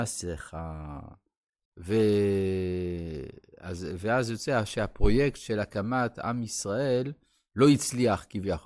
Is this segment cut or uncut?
cut